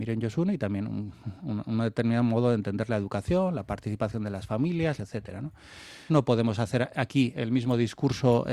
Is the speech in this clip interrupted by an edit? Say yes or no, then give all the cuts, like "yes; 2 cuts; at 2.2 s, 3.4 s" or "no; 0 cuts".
yes; 2 cuts; at 5.0 s, 6.1 s